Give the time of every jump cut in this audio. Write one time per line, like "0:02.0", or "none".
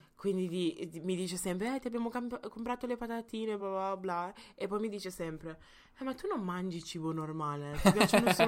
0:03.6